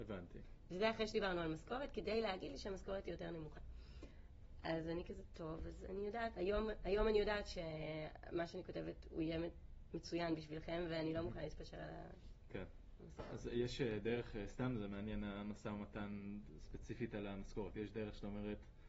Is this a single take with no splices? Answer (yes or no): yes